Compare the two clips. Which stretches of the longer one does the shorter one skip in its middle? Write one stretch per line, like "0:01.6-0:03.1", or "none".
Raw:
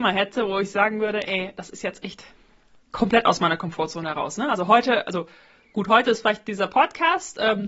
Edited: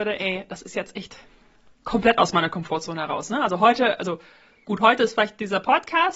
none